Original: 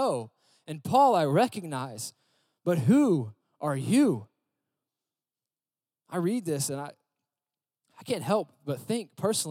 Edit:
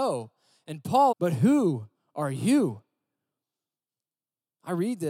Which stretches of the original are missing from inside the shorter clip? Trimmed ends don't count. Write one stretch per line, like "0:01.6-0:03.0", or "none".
0:01.1-0:02.6

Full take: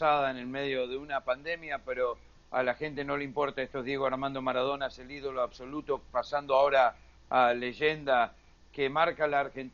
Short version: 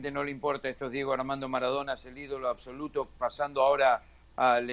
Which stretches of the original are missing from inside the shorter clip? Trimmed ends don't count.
none

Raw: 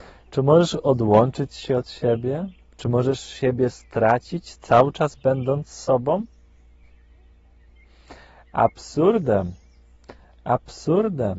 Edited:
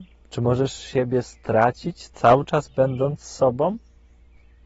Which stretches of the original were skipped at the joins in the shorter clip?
none

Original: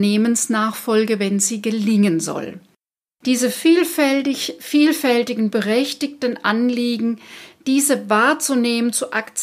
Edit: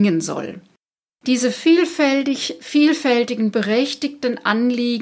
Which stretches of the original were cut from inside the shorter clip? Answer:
none

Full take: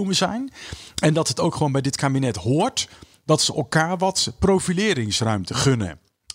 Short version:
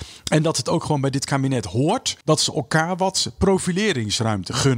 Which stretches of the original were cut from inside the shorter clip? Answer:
0:02.9-0:03.2

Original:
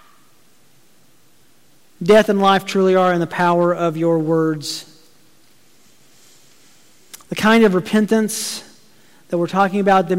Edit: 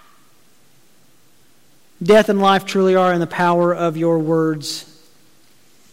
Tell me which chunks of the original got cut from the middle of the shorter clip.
none

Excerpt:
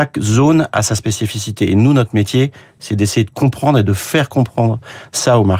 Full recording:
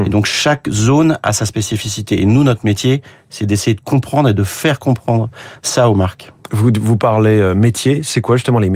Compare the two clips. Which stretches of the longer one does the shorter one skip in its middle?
none

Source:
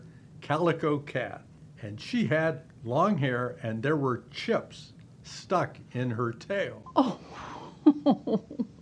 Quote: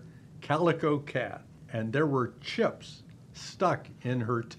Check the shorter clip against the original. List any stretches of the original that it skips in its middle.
0:01.7-0:03.6

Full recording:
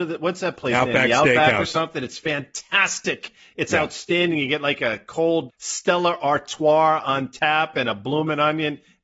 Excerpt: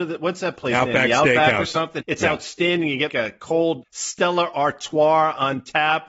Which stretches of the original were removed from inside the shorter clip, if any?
0:02.0-0:03.5
0:04.6-0:04.8

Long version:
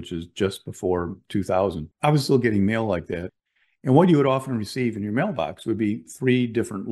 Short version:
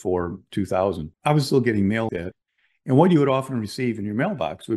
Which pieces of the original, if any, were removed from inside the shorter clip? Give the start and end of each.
0:02.9-0:03.1

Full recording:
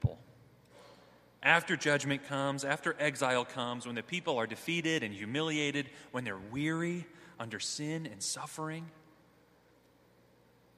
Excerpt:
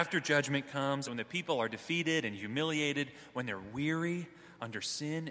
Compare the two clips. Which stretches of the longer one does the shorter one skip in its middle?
0:02.6-0:03.8

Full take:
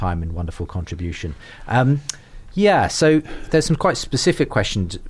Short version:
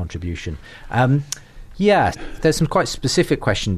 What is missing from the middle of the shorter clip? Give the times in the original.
0:02.9-0:03.2

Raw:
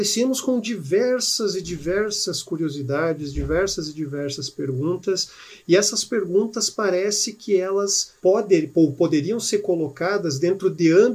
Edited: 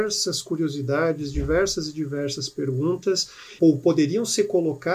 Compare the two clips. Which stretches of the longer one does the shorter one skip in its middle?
0:05.6-0:08.7

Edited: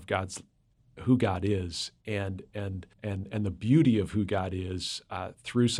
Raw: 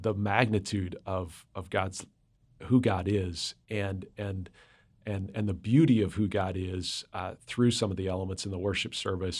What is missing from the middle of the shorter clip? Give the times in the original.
0:04.6-0:05.0

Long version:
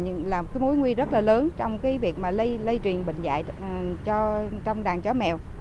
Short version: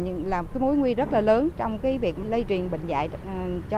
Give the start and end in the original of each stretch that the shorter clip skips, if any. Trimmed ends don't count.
0:02.2-0:02.6

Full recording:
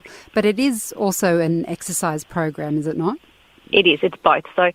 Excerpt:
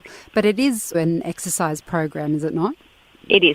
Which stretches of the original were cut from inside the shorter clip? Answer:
0:00.9-0:01.4

